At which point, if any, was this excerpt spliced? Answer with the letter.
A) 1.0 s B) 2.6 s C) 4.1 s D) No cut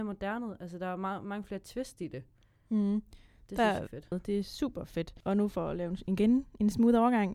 C